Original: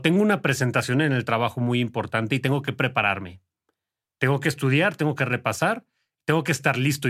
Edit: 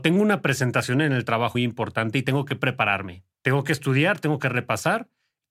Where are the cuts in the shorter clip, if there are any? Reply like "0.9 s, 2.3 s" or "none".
1.5 s, 3.3 s